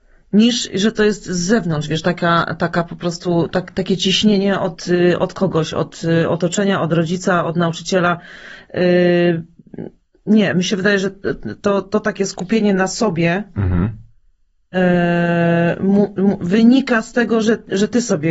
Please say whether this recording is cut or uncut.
uncut